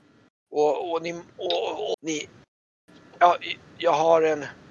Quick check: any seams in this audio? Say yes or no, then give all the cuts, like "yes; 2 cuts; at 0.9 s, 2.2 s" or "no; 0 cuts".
yes; 1 cut; at 1.9 s